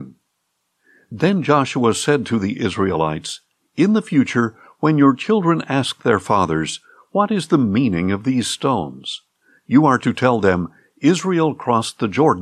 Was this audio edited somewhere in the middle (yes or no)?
no